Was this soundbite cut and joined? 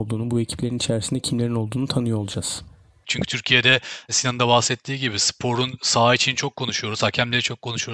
yes; 1 cut; at 3.0 s

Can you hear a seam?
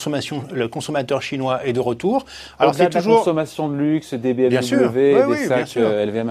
no; 0 cuts

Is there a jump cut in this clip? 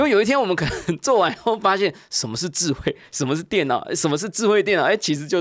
no; 0 cuts

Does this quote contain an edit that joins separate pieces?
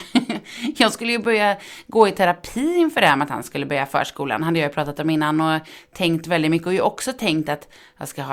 no; 0 cuts

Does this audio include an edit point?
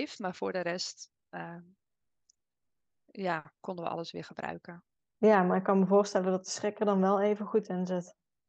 no; 0 cuts

